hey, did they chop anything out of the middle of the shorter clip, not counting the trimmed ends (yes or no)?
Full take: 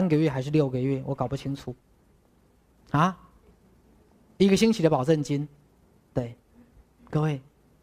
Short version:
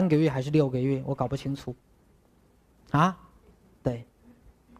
yes